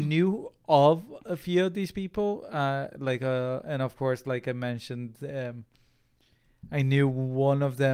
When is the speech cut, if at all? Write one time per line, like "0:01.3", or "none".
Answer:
0:03.6